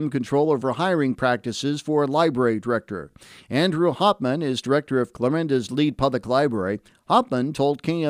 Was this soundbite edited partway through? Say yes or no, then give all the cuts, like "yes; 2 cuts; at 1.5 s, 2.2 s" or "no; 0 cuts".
no; 0 cuts